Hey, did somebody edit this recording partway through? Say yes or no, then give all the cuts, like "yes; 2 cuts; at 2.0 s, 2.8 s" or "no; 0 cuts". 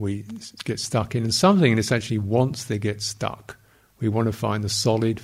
no; 0 cuts